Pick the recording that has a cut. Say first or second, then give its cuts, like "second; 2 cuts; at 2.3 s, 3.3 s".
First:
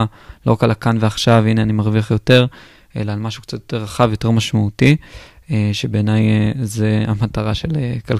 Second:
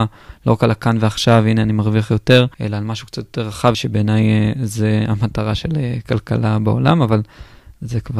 second; 2 cuts; at 2.5 s, 3.7 s